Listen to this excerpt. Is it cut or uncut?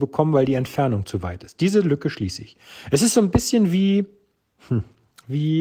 uncut